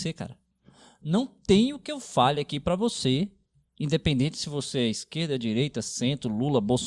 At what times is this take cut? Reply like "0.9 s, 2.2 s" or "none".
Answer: none